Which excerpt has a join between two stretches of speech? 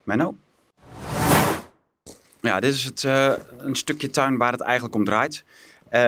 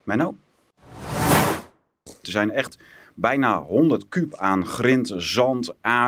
second; 1 cut; at 2.2 s

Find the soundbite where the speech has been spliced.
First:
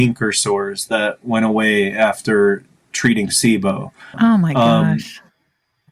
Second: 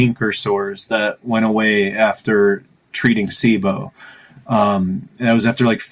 first; 1 cut; at 4.1 s

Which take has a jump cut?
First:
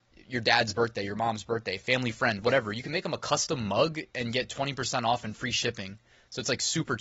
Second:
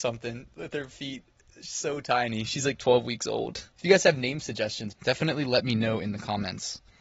second; 2 cuts; at 3.7 s, 4.9 s

